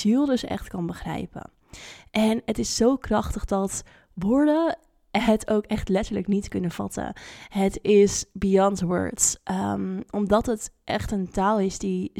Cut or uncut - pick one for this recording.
uncut